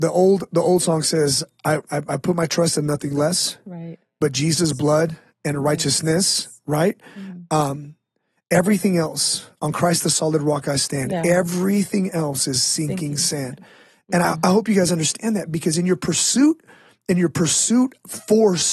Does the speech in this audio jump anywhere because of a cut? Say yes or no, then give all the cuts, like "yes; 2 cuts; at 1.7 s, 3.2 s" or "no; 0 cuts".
no; 0 cuts